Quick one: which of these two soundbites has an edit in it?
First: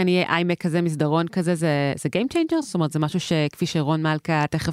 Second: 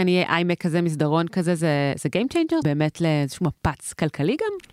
second; 1 cut; at 2.6 s

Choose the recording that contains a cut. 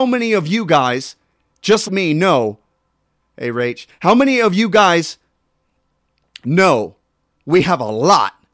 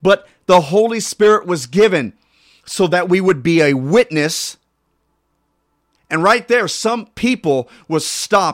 first; 1 cut; at 1.9 s

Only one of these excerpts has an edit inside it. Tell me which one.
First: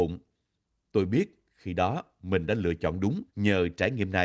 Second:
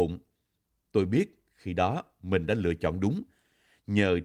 first; 1 cut; at 3.3 s

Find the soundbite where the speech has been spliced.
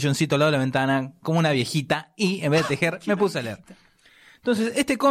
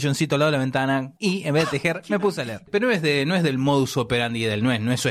second; 2 cuts; at 1.2 s, 2.7 s

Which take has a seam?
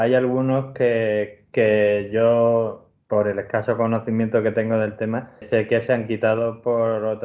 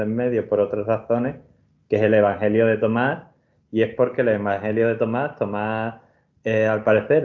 first; 2 cuts; at 3.0 s, 5.4 s

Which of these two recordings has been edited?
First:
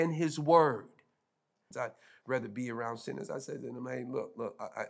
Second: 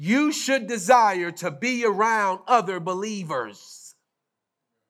first; 1 cut; at 1.7 s

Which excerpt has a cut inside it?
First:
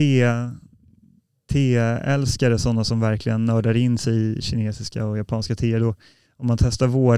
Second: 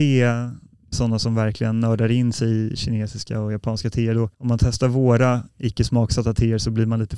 second; 2 cuts; at 0.9 s, 4.3 s

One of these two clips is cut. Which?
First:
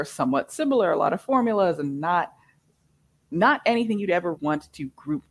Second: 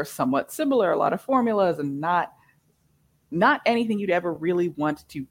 first; 1 cut; at 4.4 s

